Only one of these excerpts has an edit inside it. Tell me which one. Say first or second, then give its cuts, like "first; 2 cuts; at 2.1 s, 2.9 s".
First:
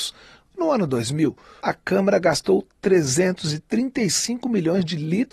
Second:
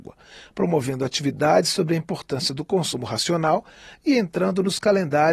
first; 1 cut; at 1.6 s